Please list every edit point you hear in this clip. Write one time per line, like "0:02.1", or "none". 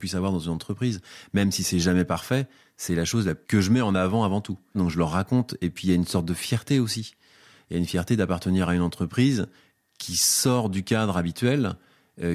0:03.4
0:04.7